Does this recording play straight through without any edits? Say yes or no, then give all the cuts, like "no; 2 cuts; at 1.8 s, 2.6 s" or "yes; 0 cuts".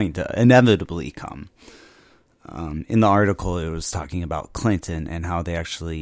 yes; 0 cuts